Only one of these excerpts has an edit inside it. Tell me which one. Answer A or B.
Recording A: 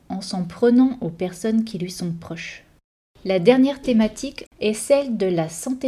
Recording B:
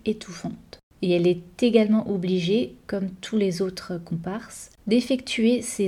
A